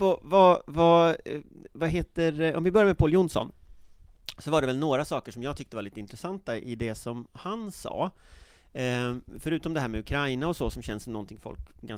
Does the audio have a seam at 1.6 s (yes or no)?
no